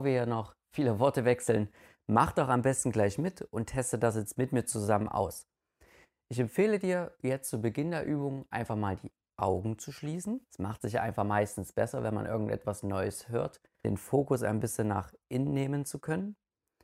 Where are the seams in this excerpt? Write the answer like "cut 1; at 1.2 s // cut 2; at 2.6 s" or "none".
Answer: cut 1; at 10.5 s // cut 2; at 13.8 s